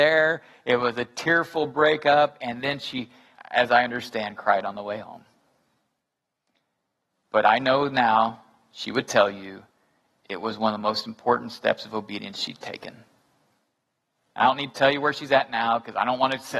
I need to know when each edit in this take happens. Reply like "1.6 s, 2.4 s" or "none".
3.4 s